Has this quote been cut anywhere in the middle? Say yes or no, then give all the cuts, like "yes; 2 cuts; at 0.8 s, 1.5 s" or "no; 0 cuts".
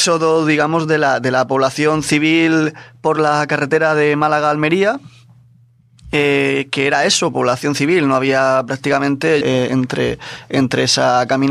yes; 1 cut; at 9.4 s